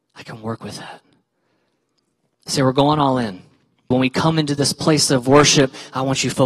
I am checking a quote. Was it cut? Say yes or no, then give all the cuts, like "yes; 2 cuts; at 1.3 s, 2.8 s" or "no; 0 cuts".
yes; 1 cut; at 3.9 s